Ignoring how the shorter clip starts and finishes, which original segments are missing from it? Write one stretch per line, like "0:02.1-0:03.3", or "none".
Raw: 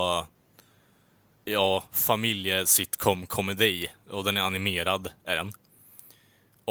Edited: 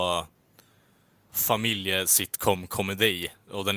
0:01.3-0:01.9